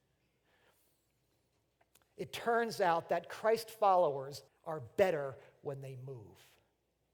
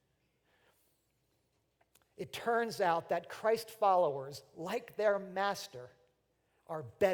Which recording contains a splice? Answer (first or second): first